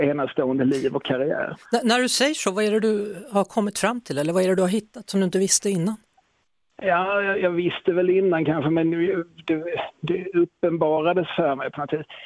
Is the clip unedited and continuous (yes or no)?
yes